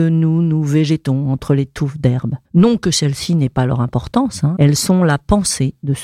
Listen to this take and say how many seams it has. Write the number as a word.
two